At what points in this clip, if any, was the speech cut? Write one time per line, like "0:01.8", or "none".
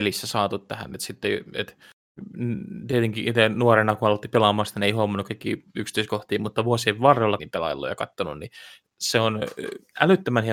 0:07.4